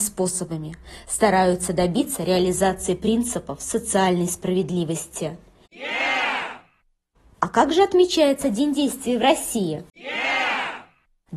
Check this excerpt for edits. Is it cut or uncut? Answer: uncut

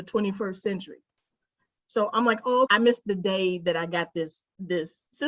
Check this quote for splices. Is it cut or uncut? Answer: cut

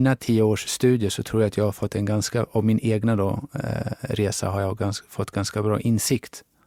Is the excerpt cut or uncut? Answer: uncut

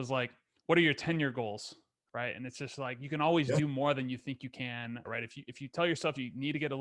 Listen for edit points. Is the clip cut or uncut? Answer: cut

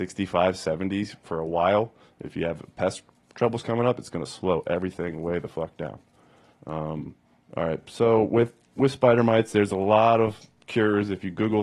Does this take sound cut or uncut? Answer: uncut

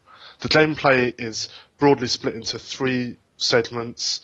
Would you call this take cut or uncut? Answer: uncut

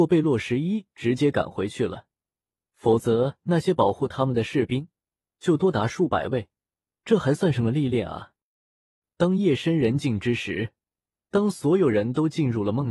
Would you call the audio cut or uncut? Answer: uncut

